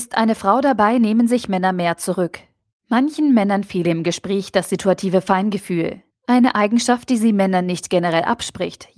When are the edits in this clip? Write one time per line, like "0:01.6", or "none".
0:02.7
0:06.1